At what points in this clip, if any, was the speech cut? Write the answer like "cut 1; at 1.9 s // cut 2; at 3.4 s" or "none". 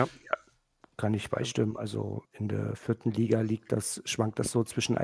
cut 1; at 2.3 s

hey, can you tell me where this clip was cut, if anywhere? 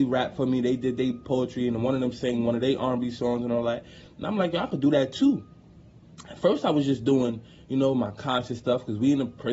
none

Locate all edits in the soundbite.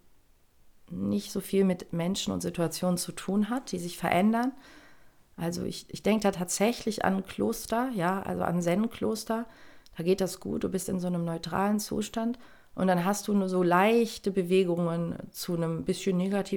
none

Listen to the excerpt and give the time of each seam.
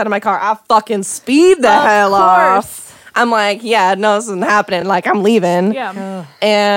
none

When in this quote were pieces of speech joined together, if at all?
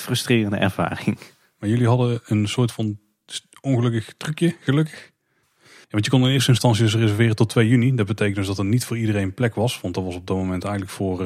cut 1; at 5.4 s

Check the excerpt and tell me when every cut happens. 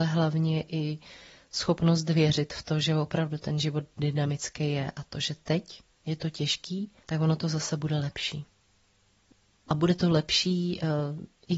cut 1; at 7.0 s

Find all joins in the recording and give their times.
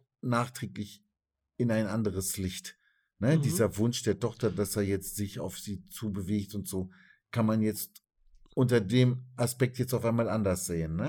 none

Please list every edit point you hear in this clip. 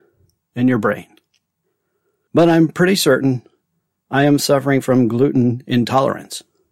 cut 1; at 2.3 s

